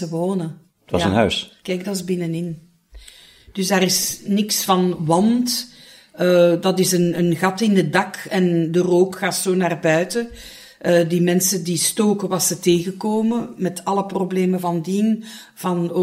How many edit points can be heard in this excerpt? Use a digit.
1